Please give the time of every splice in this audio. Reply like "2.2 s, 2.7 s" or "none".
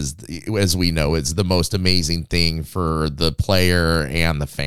none